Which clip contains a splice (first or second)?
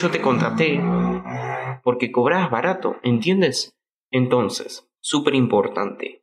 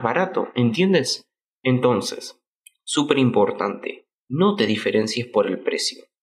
first